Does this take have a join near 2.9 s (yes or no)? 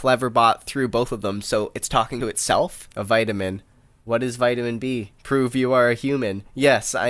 yes